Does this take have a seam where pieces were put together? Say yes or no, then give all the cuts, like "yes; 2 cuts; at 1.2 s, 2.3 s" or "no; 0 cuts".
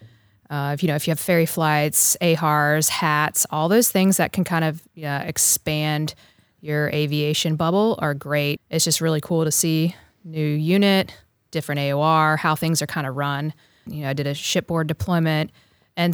yes; 2 cuts; at 8.6 s, 13.9 s